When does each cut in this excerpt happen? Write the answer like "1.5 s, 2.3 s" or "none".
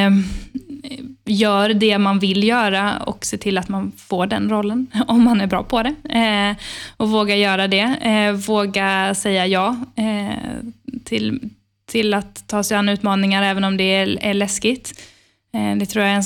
none